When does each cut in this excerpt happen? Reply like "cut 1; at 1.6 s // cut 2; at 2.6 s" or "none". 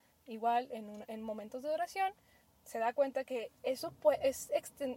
none